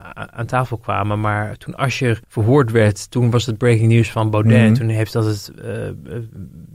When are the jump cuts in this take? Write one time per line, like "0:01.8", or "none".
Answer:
0:02.2